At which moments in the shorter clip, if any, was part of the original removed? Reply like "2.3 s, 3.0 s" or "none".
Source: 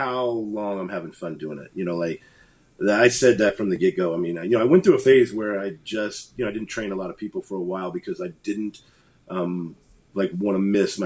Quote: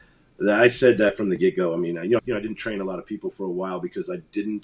2.2 s

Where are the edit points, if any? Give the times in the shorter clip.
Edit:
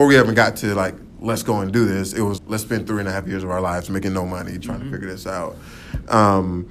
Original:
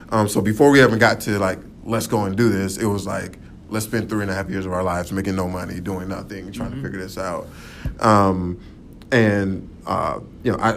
2.4 s, 4.6 s

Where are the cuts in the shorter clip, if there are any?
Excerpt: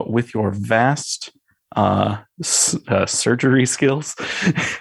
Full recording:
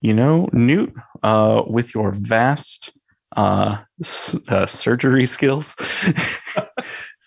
none

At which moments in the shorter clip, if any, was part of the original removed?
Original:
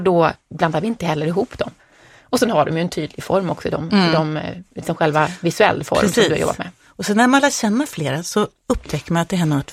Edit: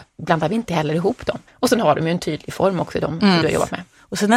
1.5 s, 3.4 s

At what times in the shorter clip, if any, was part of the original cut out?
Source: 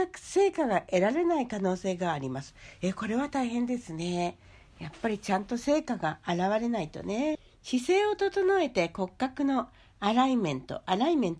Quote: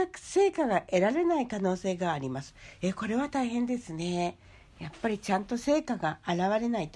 none

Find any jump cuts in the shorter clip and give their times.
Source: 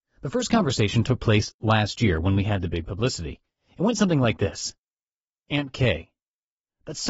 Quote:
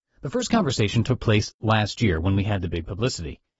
none

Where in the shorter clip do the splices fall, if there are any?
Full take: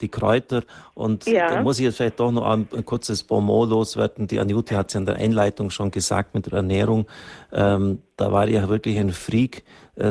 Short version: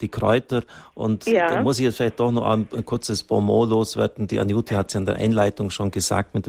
none

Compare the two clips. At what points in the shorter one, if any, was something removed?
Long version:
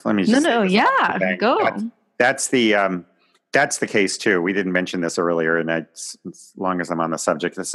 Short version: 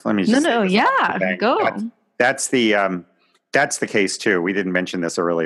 none

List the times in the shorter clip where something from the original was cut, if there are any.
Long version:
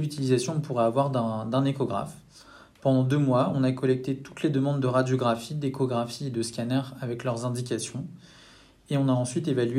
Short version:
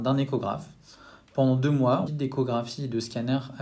2.1 s

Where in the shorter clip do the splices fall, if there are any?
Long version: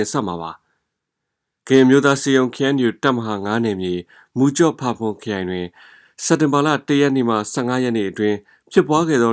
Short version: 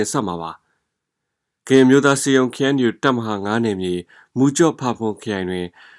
none

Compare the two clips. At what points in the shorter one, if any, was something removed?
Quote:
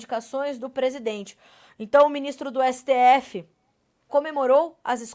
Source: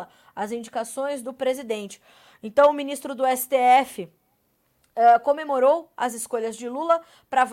4.1 s

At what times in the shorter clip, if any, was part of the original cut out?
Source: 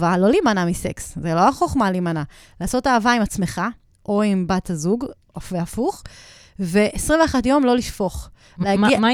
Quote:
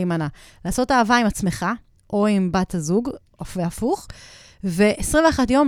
none

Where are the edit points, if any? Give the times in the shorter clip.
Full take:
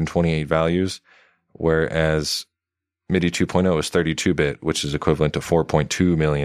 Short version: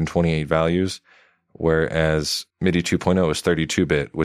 2.5 s

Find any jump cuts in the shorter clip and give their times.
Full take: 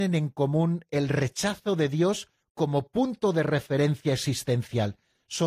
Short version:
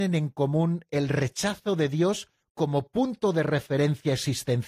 none

